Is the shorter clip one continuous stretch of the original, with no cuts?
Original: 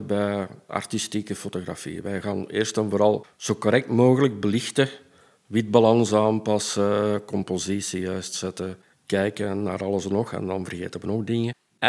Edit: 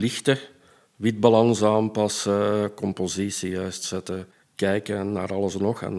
yes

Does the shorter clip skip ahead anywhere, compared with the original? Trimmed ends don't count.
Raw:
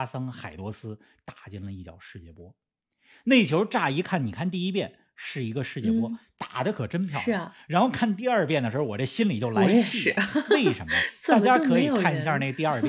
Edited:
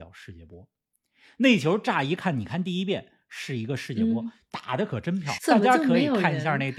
yes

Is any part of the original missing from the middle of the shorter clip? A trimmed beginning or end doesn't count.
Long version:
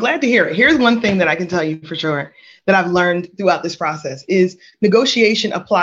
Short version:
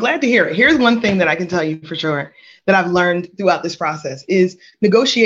no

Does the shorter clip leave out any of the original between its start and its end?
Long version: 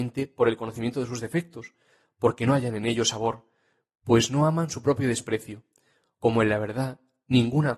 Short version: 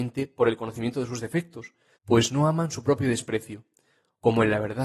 yes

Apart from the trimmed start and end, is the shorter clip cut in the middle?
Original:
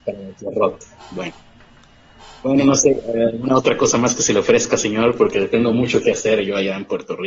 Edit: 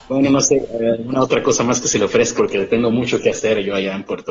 yes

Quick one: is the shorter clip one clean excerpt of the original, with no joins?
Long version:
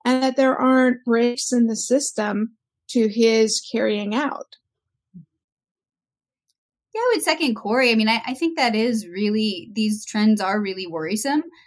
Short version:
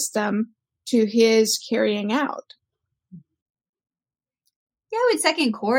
yes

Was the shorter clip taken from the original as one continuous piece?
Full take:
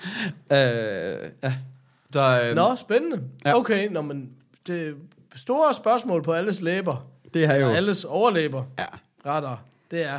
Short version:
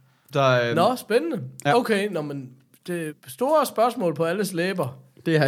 no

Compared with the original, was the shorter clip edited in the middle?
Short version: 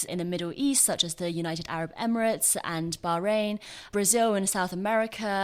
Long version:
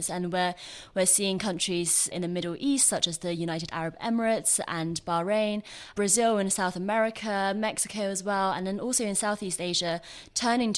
no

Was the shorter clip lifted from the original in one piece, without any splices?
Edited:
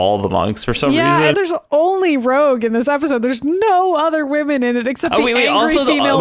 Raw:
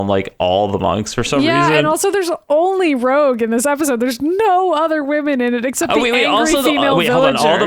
no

